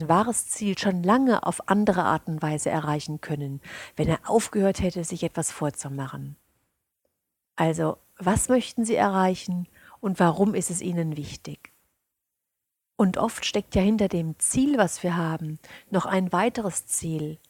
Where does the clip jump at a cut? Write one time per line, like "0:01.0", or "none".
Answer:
none

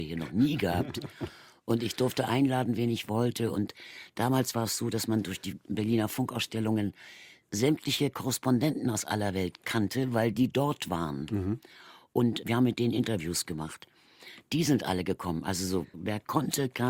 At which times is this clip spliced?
none

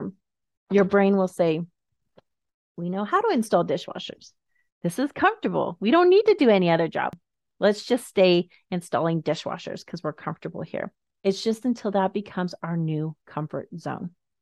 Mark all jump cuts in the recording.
0:11.2

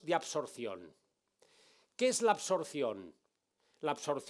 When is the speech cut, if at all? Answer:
none

